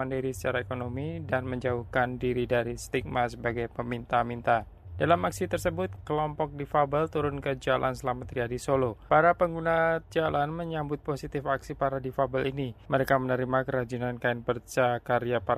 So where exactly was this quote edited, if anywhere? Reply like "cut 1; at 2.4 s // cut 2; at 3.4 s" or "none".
cut 1; at 9.1 s